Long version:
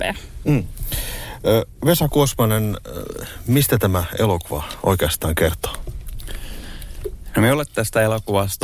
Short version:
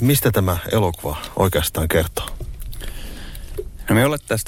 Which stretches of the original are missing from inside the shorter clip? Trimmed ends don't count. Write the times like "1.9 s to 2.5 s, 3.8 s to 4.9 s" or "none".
none